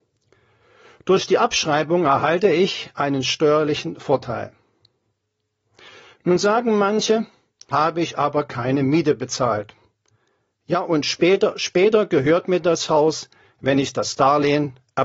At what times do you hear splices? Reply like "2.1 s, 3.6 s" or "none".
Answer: 7.7 s